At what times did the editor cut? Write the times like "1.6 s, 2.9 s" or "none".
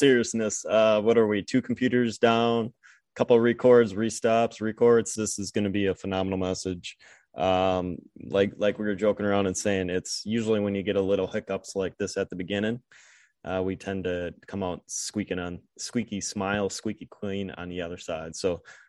5.2 s